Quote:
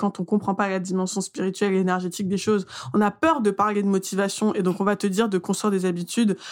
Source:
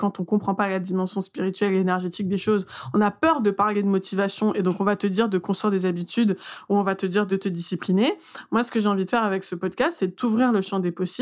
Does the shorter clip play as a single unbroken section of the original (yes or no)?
yes